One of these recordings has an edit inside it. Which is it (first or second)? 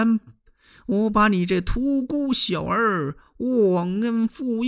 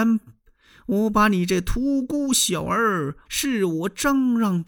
second